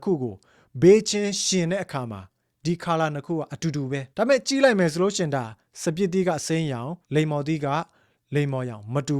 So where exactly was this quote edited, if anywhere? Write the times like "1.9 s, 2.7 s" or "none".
4.1 s, 7.0 s